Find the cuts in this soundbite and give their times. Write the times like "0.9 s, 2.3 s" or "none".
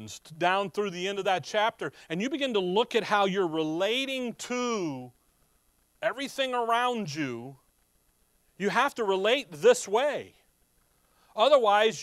none